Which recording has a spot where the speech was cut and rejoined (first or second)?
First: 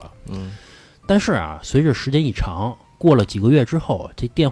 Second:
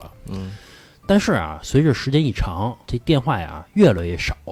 second